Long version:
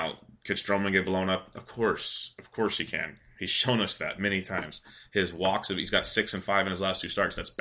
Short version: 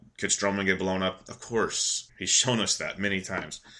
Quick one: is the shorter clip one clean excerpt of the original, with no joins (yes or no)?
no